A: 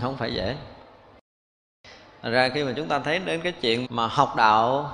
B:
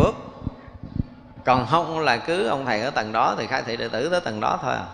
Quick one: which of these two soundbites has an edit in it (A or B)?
A